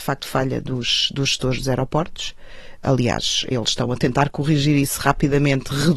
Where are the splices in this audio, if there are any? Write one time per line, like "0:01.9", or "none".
none